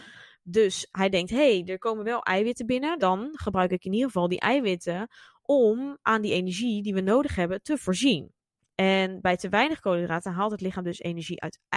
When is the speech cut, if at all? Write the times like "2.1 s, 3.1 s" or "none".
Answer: 3.0 s, 8.7 s